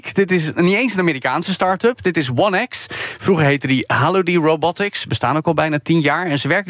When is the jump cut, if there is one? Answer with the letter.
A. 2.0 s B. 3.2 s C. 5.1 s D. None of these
D